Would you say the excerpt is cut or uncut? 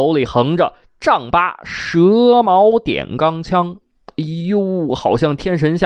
uncut